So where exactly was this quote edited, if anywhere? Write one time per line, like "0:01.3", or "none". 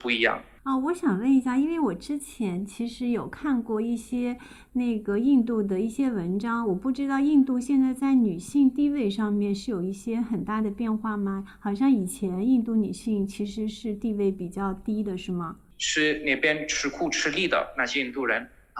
0:15.7